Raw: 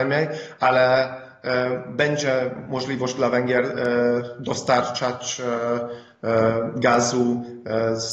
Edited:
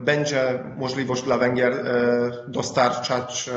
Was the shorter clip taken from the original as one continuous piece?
yes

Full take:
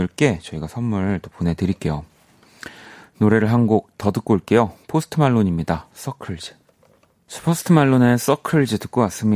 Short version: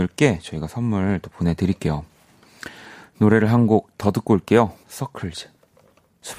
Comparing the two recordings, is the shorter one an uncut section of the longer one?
no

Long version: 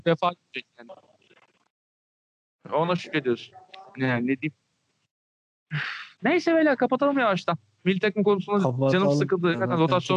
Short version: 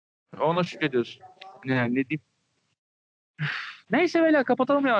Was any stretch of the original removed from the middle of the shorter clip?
no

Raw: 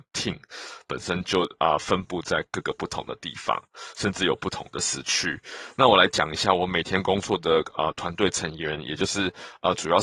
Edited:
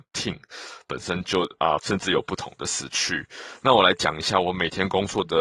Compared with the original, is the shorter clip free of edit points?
no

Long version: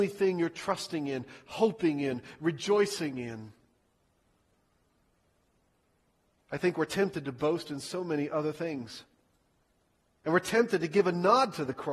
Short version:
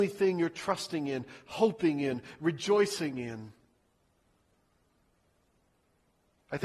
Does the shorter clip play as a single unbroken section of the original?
yes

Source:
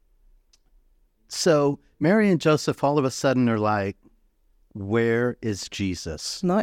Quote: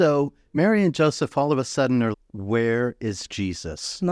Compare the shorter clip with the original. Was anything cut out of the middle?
yes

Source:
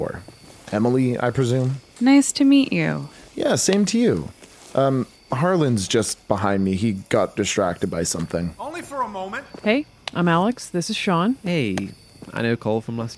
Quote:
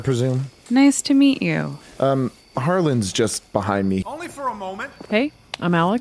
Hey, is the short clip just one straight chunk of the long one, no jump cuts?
no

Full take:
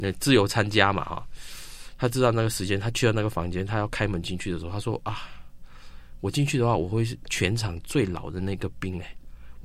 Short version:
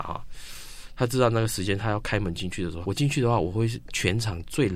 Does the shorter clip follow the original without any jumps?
no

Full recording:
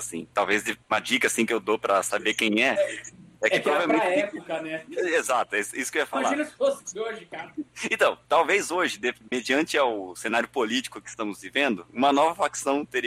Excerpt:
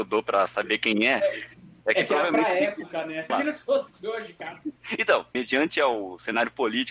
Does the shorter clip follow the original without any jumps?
no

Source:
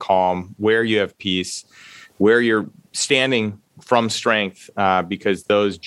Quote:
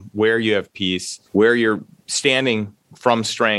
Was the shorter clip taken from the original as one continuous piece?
no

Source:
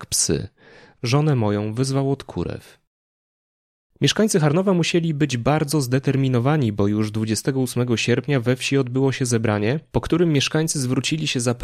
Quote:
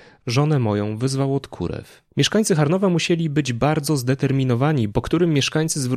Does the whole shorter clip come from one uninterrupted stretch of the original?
no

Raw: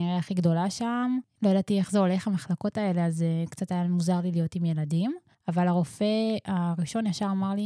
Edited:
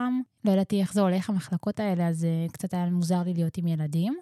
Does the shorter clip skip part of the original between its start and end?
no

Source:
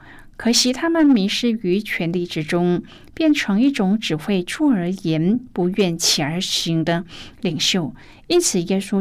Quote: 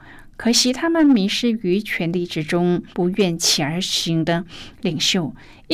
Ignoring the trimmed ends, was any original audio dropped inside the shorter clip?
yes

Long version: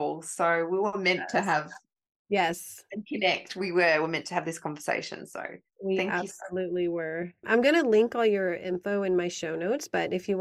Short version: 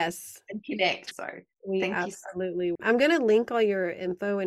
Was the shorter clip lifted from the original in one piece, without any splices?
no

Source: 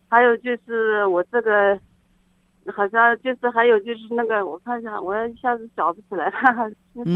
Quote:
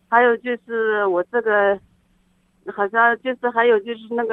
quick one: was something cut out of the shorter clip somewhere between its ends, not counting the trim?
no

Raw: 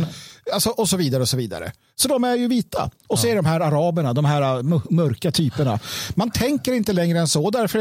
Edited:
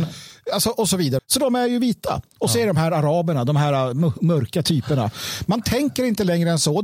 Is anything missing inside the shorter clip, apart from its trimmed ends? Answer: yes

